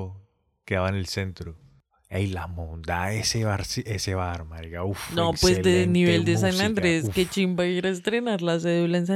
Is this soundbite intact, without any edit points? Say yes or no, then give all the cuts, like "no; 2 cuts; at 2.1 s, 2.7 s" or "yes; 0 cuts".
yes; 0 cuts